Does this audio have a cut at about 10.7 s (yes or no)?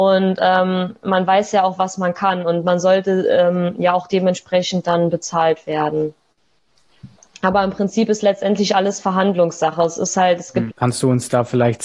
yes